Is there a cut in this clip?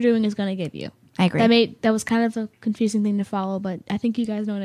yes; 1 cut; at 1.0 s

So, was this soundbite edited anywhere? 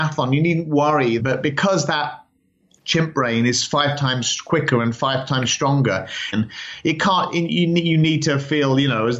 yes; 2 cuts; at 1.2 s, 6.3 s

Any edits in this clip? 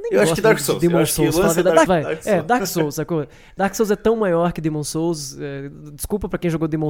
yes; 1 cut; at 1.9 s

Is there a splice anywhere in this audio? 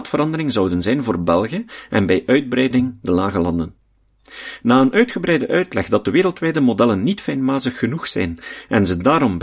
no; 0 cuts

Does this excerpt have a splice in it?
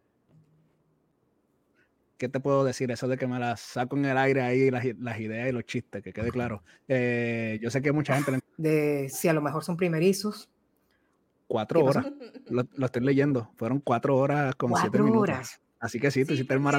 yes; 1 cut; at 8.4 s

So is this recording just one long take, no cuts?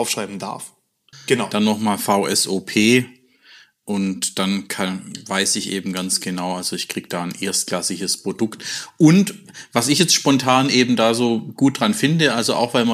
no; 1 cut; at 1.1 s

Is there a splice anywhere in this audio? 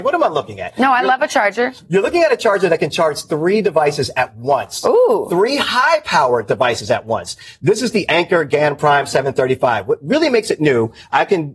no; 0 cuts

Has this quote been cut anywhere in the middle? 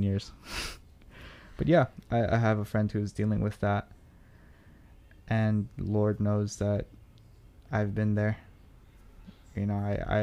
no; 0 cuts

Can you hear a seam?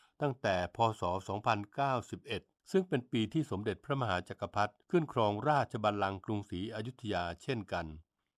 yes; 1 cut; at 4.8 s

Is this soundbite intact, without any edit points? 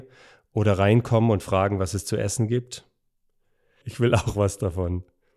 no; 1 cut; at 3.8 s

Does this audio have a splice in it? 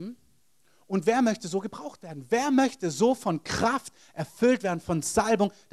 no; 0 cuts

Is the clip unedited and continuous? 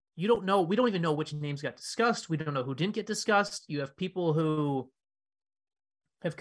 yes; 0 cuts

